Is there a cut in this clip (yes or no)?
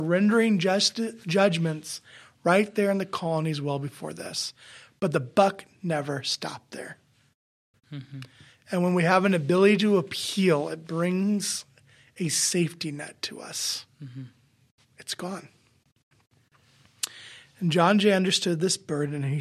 yes